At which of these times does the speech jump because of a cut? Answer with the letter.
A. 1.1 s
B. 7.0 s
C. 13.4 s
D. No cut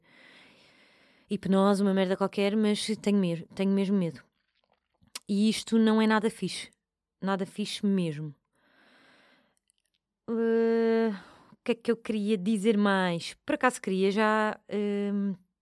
D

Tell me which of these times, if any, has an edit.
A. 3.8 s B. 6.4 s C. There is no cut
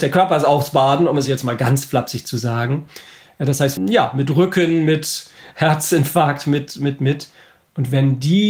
A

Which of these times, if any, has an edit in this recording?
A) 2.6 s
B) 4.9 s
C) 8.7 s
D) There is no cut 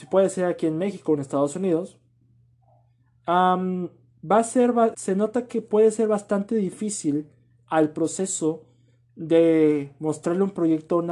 B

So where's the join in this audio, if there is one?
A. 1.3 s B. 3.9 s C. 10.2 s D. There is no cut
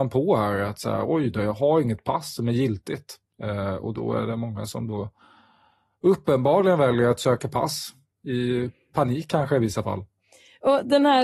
B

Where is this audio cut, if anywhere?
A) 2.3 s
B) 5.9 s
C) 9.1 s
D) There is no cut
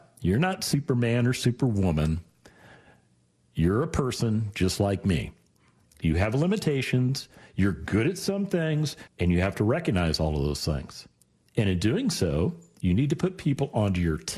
C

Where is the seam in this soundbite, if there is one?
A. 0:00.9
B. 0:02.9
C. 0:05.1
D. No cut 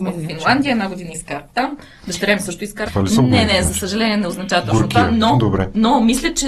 B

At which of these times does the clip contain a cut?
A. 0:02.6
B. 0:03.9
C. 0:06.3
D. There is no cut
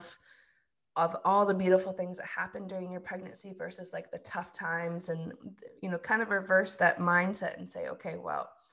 D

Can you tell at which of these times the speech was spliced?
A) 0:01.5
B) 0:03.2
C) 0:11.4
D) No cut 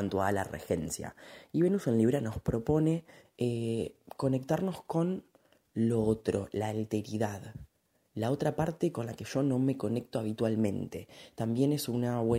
D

